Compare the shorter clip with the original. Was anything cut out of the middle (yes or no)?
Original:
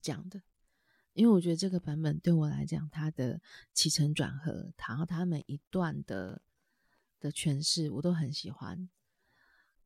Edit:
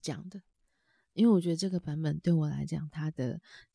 no